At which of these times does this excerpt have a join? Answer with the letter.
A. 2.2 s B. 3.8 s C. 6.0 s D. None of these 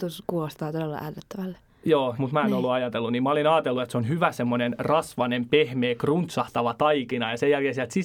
A